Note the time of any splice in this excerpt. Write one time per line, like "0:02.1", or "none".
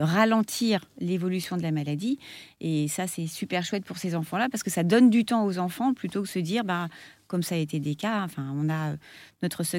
none